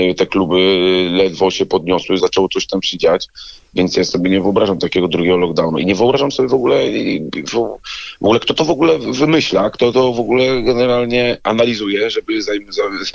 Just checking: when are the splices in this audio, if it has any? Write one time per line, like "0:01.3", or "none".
0:02.2